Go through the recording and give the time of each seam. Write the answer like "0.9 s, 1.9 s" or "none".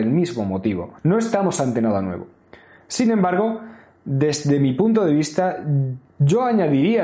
1.0 s